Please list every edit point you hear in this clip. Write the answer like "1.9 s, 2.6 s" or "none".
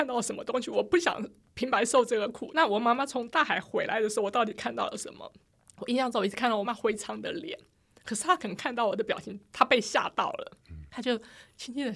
6.6 s